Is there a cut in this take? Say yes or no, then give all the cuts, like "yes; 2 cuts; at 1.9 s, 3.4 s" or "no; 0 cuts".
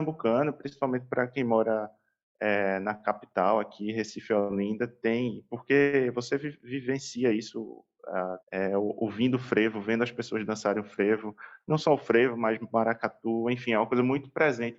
yes; 1 cut; at 8.4 s